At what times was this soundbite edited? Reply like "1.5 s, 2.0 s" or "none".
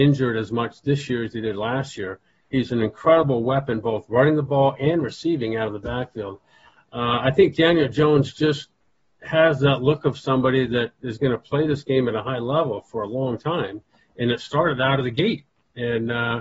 none